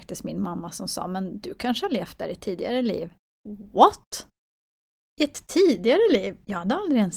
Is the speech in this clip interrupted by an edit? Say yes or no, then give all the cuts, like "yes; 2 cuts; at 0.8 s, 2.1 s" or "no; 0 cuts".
no; 0 cuts